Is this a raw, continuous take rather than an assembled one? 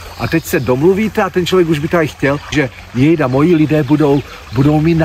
no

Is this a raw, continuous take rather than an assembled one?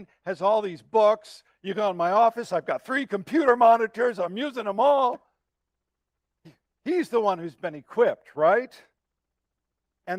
yes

